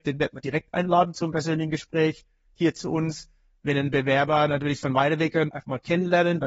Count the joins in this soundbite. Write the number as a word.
one